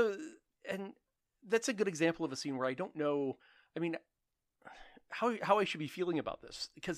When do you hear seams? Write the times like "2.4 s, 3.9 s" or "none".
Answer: none